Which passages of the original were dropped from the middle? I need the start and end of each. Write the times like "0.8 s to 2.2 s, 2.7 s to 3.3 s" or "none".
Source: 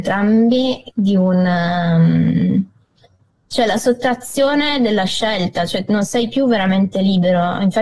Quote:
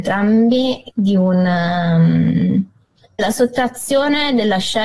3.2 s to 3.7 s